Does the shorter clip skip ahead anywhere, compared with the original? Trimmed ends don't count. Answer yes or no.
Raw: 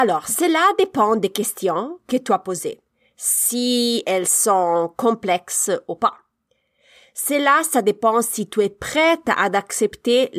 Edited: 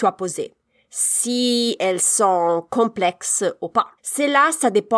yes